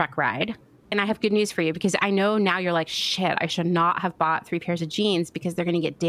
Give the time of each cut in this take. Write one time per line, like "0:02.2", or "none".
0:00.9